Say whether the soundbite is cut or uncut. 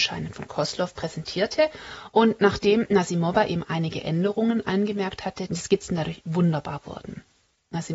cut